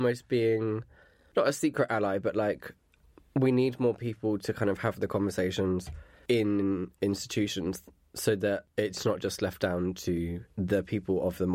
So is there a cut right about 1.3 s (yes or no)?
no